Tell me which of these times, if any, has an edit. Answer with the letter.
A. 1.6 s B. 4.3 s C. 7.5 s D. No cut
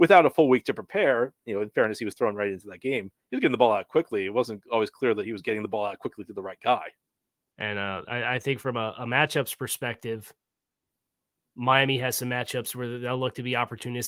C